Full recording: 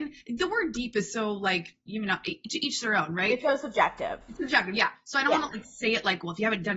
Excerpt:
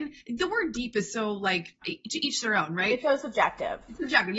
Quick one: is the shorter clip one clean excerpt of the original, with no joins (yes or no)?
no